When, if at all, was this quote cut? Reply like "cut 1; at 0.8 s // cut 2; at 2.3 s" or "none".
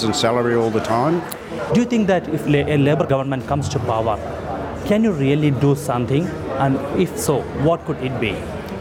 cut 1; at 1.7 s